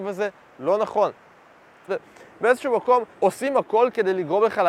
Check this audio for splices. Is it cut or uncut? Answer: cut